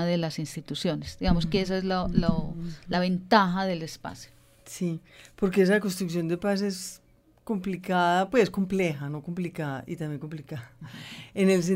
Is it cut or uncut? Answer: uncut